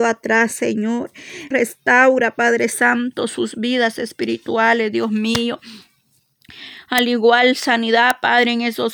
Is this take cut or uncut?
cut